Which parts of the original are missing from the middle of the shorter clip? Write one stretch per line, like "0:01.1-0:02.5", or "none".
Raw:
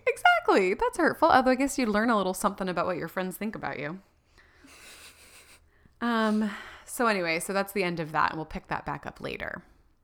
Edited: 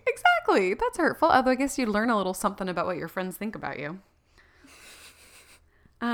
none